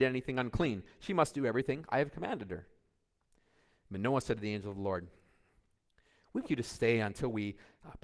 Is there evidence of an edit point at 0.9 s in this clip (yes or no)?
no